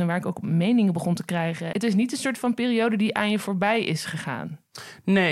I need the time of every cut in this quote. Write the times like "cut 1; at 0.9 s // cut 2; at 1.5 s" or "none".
cut 1; at 1.7 s